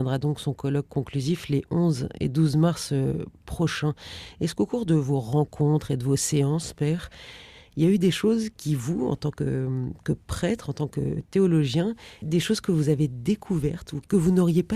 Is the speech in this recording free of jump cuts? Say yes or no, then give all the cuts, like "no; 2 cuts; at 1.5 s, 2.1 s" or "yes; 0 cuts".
yes; 0 cuts